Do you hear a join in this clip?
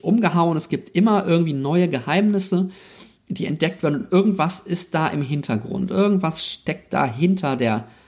no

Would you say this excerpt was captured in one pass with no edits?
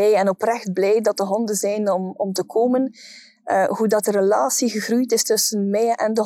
yes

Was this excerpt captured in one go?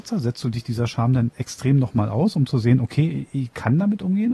yes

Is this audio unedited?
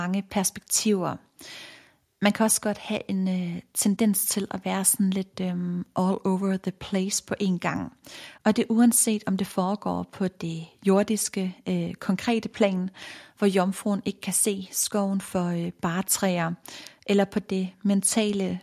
yes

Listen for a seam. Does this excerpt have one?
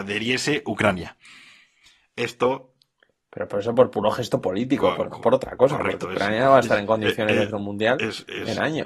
no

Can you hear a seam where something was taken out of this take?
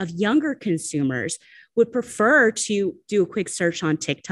no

